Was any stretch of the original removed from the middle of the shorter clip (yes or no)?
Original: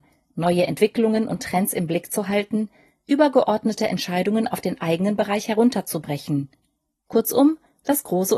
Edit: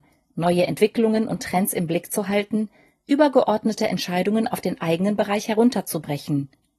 no